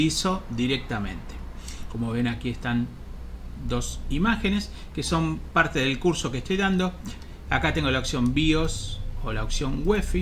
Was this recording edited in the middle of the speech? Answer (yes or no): yes